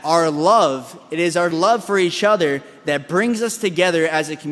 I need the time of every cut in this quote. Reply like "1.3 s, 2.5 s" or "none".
1.5 s